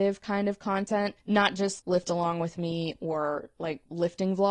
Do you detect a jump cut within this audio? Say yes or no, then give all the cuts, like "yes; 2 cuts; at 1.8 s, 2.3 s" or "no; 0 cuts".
yes; 1 cut; at 1.8 s